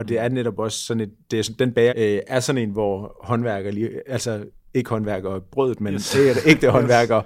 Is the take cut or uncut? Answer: cut